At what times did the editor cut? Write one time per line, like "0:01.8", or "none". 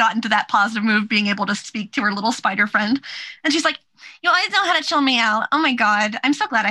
none

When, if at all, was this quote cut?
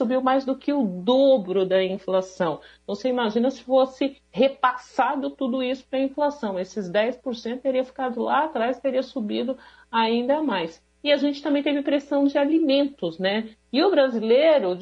none

